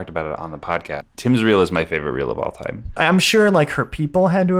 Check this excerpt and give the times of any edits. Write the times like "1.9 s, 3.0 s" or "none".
1.0 s, 3.0 s